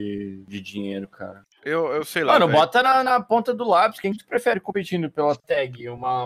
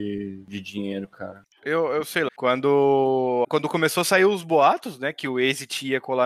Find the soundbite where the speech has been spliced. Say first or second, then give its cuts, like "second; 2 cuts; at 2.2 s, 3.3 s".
second; 2 cuts; at 2.3 s, 3.4 s